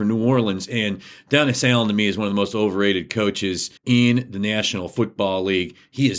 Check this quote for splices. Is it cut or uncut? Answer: cut